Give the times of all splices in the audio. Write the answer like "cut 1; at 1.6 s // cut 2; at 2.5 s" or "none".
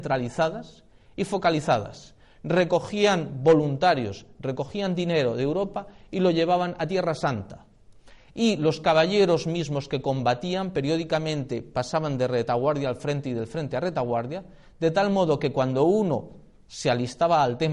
none